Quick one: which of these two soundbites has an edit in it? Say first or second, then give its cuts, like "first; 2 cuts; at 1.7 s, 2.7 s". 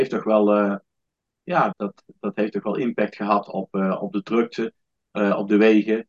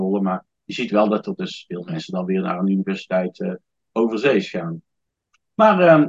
first; 1 cut; at 1.7 s